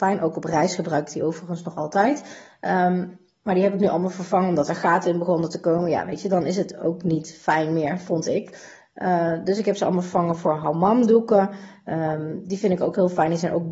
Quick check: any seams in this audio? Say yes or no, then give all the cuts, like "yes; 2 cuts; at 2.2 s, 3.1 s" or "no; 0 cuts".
no; 0 cuts